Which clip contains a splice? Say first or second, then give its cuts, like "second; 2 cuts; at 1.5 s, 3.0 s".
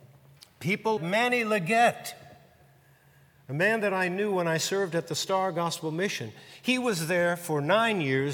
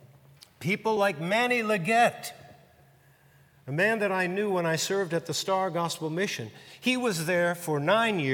first; 1 cut; at 1.0 s